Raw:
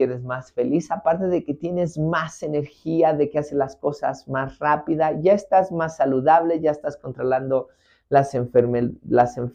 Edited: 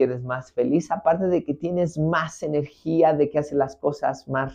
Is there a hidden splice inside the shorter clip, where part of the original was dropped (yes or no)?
no